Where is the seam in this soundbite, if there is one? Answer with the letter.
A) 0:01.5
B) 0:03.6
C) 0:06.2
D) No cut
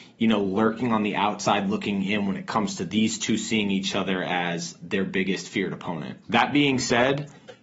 C